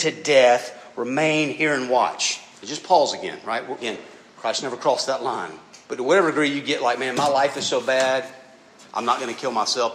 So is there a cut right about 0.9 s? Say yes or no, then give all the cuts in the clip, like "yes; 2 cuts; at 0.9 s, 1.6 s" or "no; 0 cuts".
no; 3 cuts; at 2.5 s, 3.8 s, 5.8 s